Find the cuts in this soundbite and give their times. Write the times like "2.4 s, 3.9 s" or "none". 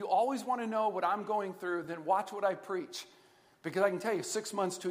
none